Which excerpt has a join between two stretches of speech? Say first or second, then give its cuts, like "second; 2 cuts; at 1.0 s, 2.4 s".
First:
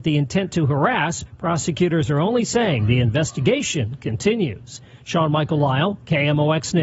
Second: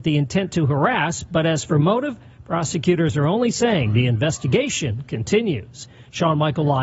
first; 1 cut; at 1.3 s